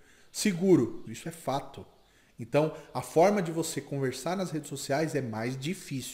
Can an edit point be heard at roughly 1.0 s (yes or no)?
yes